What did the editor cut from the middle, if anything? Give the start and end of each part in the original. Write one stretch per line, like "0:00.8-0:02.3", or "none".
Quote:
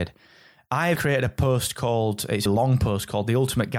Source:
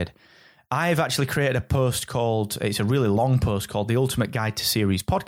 0:01.0-0:01.3
0:02.8-0:03.1

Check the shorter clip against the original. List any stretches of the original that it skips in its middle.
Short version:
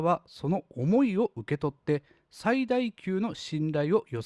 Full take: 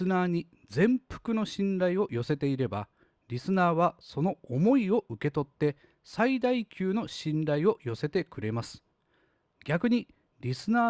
none

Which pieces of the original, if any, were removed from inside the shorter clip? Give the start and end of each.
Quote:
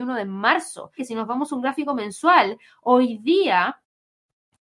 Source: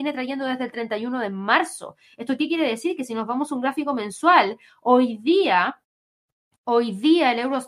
0:02.0-0:03.0

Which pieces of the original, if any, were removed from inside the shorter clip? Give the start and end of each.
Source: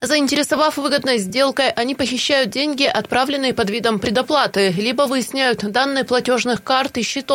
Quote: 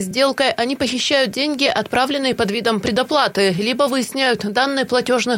none

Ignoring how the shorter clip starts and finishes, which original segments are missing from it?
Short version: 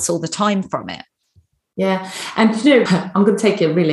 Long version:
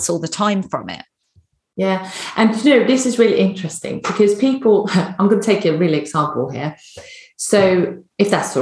0:02.9-0:04.9

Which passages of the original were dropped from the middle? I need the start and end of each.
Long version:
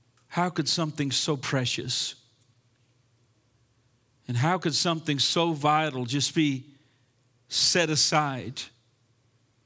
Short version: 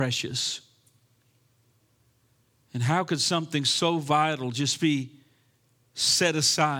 none

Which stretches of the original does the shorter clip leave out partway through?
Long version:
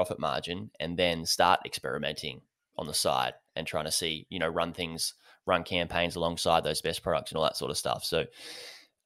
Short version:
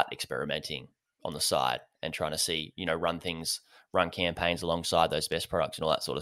none

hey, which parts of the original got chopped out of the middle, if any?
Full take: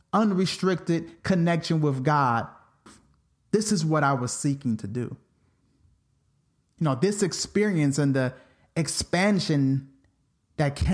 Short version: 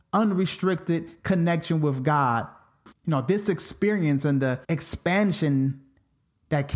0:02.9-0:06.7
0:08.4-0:08.7

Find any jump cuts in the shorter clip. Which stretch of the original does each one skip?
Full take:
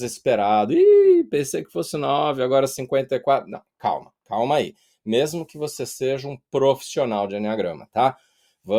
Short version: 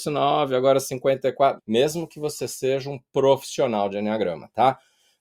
0:03.5-0:05.0

